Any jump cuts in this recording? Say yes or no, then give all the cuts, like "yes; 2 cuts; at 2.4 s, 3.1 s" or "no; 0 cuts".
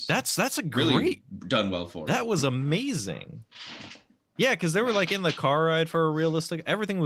no; 0 cuts